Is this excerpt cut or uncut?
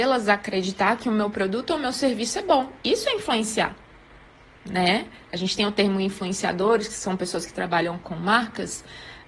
uncut